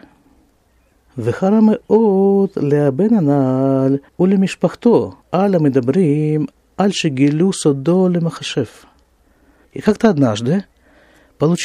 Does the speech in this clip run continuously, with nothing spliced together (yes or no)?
no